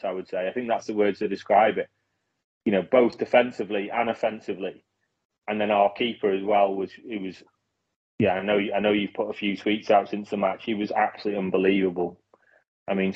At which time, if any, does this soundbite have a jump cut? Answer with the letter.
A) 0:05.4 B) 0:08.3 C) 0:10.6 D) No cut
D